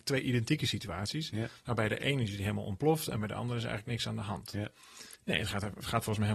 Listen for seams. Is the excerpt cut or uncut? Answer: cut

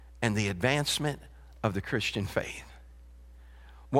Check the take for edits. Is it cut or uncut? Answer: uncut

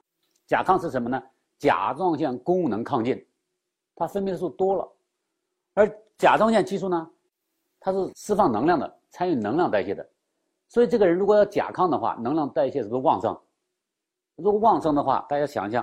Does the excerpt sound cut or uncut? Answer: uncut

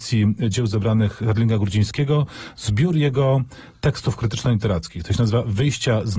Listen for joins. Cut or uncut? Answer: uncut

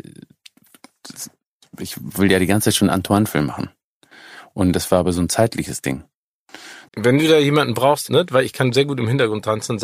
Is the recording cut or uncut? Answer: cut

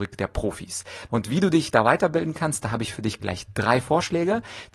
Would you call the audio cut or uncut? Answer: cut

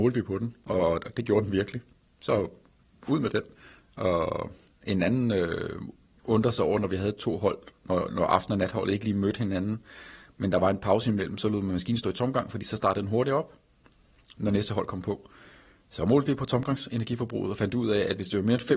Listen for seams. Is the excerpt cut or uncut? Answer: uncut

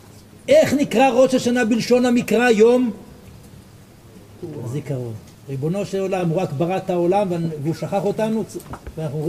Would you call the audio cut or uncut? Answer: uncut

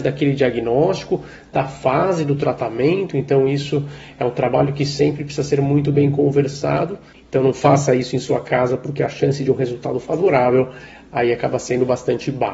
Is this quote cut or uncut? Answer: uncut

